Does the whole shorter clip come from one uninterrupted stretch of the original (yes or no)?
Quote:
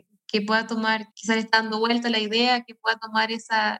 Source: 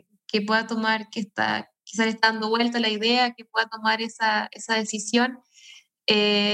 no